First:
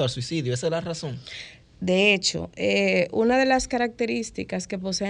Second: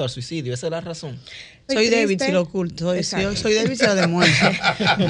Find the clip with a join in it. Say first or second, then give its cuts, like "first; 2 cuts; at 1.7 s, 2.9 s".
second; 1 cut; at 1.7 s